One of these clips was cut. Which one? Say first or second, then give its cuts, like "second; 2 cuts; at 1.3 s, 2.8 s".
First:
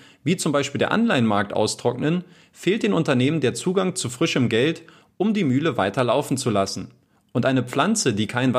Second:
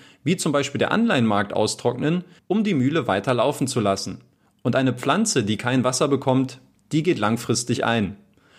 second; 1 cut; at 2.4 s